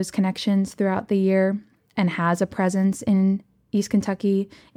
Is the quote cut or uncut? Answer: uncut